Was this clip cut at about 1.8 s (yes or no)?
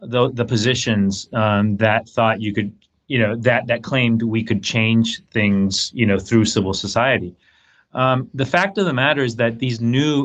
yes